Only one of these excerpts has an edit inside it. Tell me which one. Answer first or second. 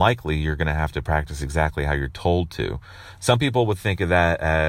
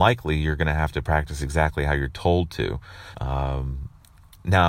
second